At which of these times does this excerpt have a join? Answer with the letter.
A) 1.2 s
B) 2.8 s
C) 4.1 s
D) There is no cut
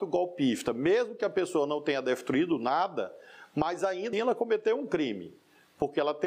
C